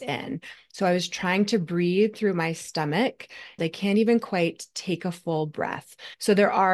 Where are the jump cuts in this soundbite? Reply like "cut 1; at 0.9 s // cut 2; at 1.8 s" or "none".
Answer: cut 1; at 3.6 s